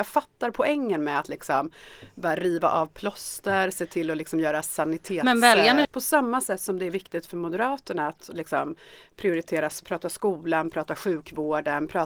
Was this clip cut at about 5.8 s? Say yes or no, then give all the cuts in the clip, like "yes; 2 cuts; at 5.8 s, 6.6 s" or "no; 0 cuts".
yes; 1 cut; at 5.8 s